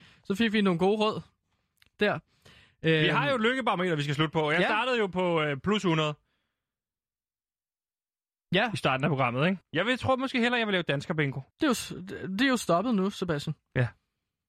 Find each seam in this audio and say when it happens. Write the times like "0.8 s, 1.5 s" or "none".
9.6 s, 11.5 s